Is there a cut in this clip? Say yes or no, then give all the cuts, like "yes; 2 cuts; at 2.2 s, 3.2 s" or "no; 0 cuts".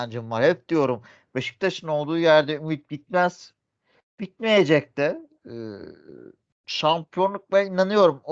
no; 0 cuts